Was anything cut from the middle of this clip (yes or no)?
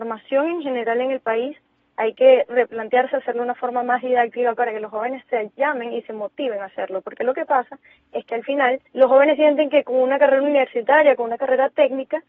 yes